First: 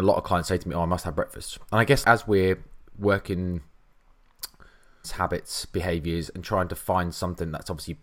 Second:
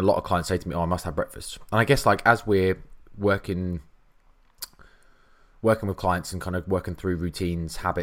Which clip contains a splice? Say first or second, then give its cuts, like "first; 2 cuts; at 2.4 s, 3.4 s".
first; 2 cuts; at 2.0 s, 5.0 s